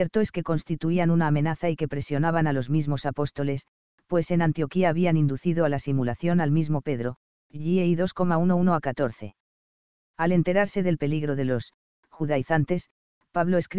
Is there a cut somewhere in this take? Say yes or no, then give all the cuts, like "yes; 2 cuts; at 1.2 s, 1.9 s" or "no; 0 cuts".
no; 0 cuts